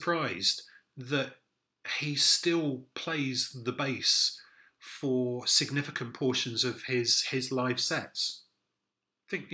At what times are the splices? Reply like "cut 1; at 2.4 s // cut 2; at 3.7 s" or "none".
none